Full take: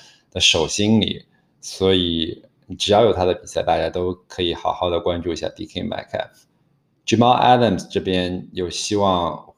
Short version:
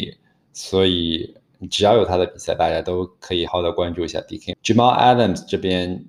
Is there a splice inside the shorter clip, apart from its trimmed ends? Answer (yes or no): yes